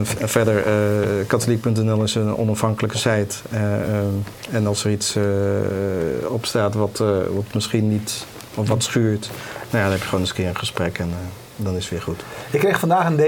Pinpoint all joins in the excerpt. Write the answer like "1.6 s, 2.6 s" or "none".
none